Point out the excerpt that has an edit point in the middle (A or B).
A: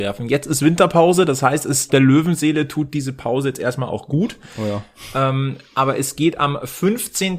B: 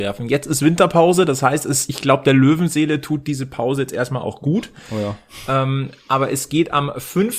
A